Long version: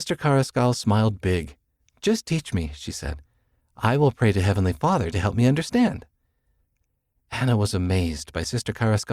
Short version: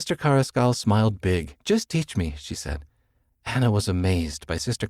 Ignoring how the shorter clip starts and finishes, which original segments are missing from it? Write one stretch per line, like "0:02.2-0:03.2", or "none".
0:01.6-0:02.0
0:03.7-0:07.2